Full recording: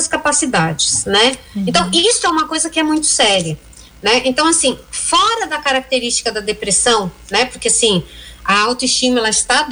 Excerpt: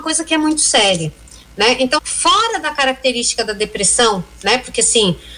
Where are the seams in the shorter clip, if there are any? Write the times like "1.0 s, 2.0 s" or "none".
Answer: 2.0 s